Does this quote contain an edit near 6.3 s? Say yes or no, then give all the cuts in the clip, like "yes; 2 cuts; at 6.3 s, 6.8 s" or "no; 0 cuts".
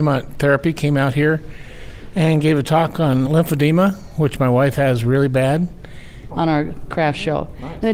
yes; 2 cuts; at 3.3 s, 6.3 s